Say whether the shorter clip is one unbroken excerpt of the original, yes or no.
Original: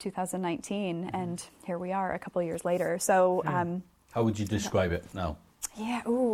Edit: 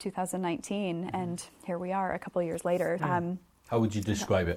no